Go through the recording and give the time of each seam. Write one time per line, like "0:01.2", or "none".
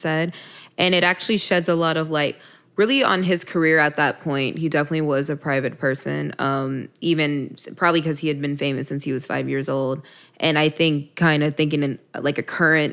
none